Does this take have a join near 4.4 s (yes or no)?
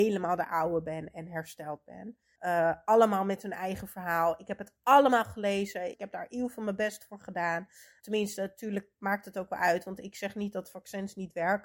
no